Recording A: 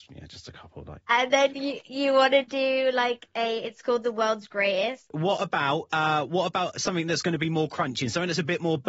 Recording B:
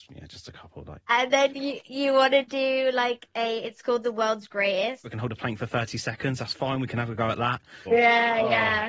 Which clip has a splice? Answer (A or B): B